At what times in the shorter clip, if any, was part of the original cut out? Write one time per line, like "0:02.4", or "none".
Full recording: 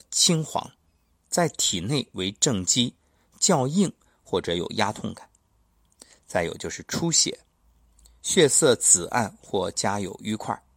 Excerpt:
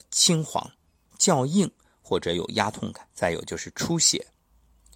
0:01.1
0:03.1